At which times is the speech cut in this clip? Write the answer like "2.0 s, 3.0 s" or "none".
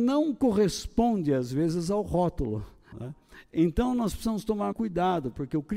2.9 s, 4.7 s